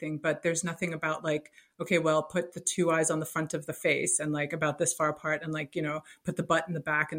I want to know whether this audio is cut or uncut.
uncut